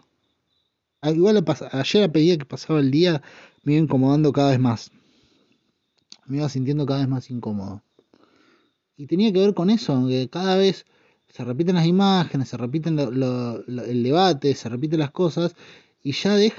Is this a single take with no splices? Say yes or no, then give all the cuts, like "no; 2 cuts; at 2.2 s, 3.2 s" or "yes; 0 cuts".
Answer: no; 1 cut; at 1.0 s